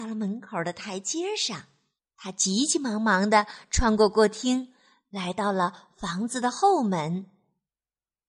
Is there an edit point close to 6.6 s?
no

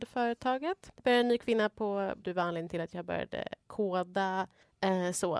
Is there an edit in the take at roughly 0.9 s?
yes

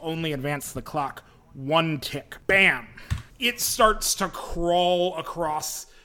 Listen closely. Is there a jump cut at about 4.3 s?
no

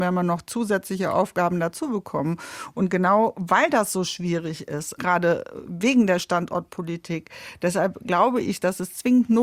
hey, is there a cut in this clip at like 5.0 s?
yes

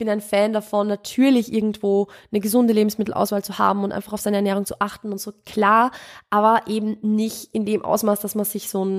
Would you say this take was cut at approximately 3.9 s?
no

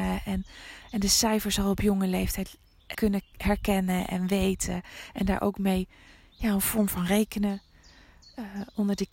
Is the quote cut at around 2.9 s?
yes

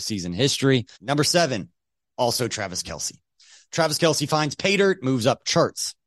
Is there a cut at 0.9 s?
yes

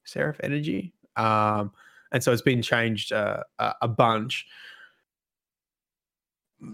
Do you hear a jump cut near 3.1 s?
no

